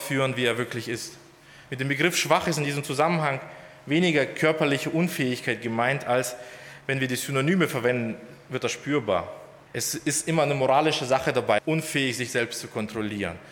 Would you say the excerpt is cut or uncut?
cut